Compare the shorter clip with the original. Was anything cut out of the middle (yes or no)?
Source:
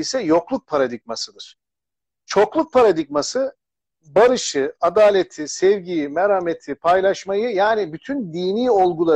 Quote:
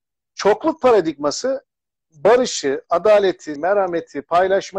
yes